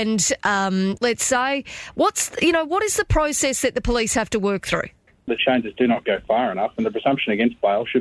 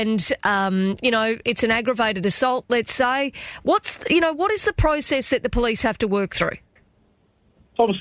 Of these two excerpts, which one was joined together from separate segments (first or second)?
first